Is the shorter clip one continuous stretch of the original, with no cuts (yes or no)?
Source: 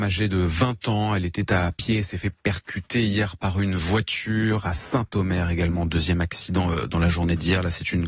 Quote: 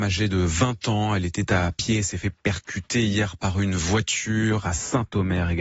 yes